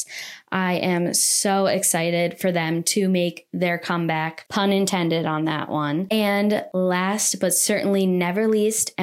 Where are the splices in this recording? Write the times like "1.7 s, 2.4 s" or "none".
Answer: none